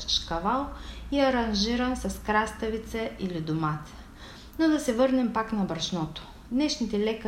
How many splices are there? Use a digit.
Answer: 0